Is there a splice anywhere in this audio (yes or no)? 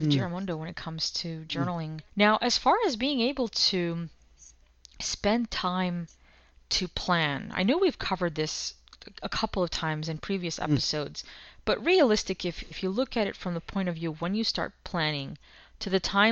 yes